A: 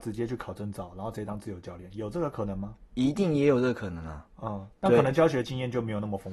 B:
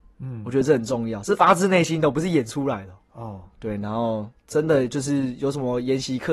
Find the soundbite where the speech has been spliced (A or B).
B